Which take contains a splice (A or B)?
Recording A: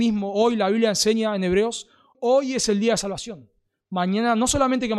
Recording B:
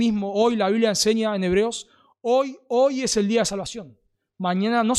A